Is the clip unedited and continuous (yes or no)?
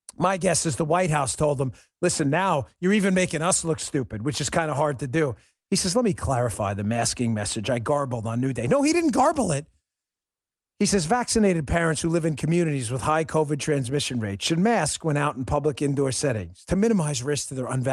yes